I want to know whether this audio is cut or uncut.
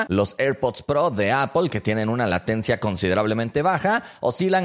uncut